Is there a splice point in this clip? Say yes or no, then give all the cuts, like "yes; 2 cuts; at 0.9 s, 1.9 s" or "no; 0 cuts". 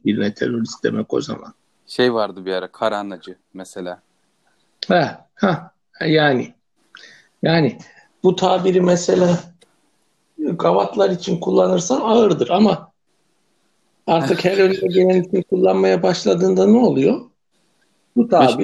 no; 0 cuts